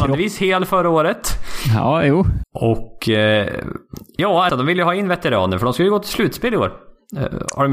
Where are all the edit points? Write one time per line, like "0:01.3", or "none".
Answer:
0:02.4
0:04.5